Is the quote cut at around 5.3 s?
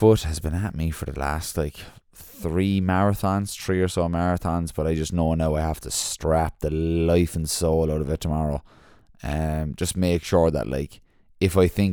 no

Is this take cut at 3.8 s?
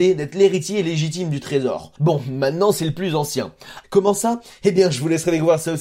yes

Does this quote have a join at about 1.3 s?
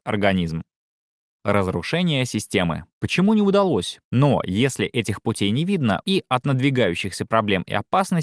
no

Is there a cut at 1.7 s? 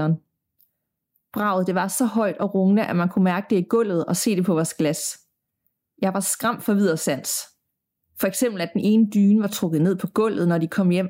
no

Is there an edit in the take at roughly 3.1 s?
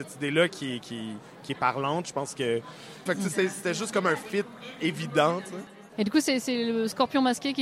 yes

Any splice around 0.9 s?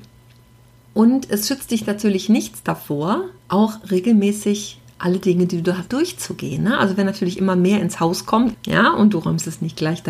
no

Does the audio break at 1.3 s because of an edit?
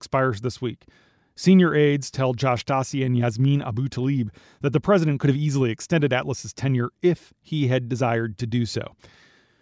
no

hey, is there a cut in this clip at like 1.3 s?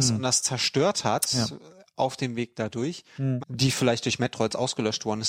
no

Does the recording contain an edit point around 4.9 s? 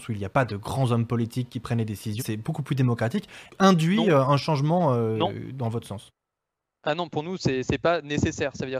no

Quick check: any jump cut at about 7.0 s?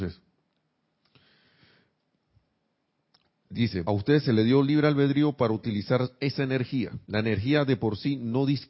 yes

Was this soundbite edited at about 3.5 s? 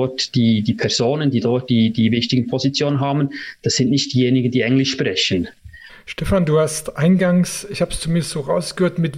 no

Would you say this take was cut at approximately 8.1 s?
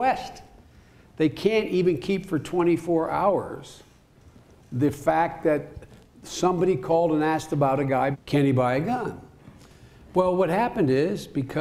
yes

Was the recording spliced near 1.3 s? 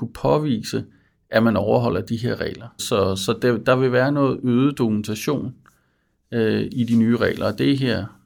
no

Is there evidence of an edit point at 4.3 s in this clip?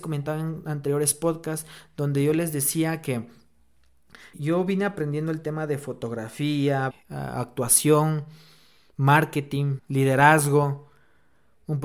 yes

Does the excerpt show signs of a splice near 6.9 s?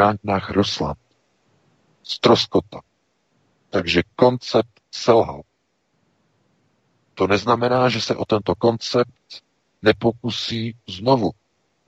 no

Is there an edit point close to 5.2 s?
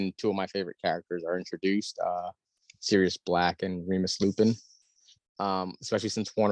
yes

